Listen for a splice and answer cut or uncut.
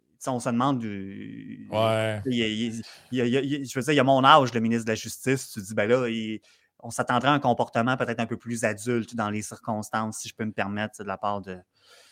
uncut